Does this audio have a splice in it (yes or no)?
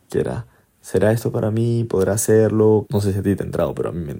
yes